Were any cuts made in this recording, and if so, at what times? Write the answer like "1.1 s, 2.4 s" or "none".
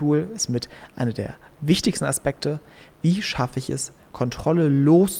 4.1 s